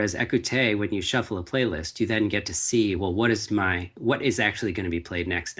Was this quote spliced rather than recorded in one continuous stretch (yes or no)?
no